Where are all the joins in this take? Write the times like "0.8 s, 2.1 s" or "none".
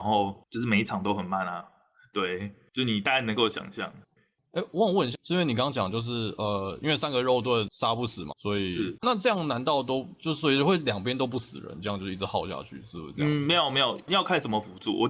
5.1 s, 8.3 s